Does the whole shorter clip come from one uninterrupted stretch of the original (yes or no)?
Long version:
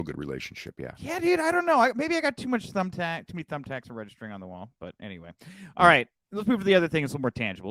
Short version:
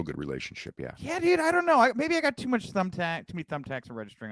yes